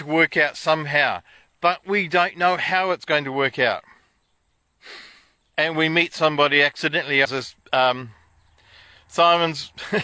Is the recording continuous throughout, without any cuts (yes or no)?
no